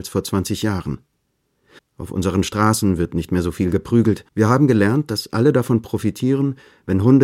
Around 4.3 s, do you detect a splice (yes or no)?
yes